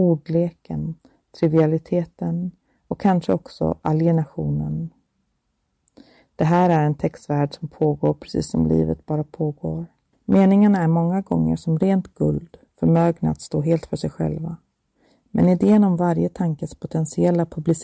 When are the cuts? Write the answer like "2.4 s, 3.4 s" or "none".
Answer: 10.1 s